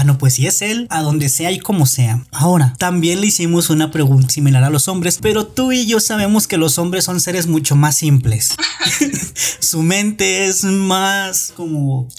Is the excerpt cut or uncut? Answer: cut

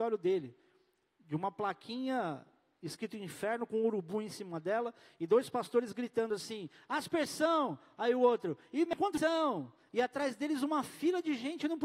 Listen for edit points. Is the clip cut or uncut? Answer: uncut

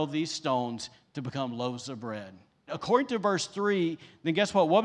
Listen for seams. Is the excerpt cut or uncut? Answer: cut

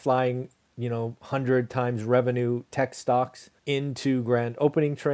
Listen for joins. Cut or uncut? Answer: cut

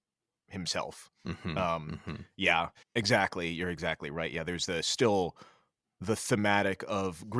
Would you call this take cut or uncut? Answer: cut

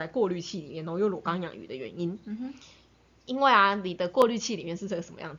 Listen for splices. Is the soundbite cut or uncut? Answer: uncut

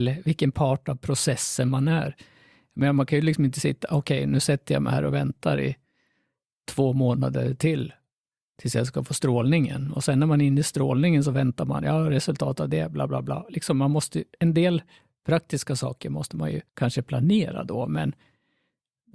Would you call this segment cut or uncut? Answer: cut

